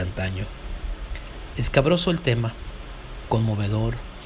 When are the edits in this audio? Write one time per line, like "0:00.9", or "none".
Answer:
0:01.5
0:03.3